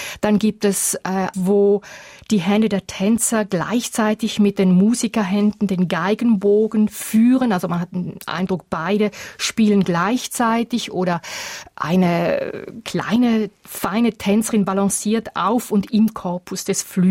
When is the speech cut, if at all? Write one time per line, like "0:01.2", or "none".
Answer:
0:01.3

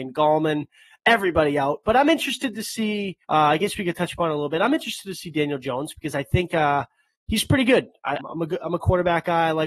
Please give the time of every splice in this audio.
0:03.2
0:08.2

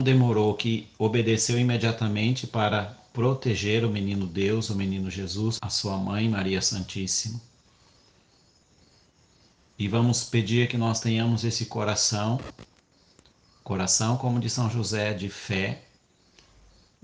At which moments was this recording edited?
0:05.6

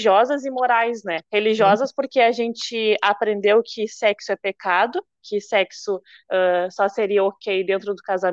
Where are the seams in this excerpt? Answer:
0:01.2

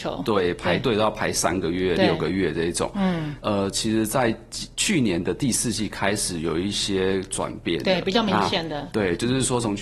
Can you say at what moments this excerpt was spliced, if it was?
0:03.4

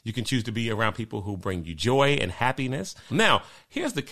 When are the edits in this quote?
0:03.1

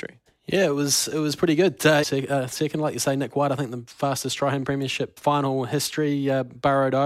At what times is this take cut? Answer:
0:02.0
0:05.2

